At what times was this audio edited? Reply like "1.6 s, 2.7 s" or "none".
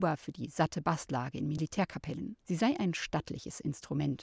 2.4 s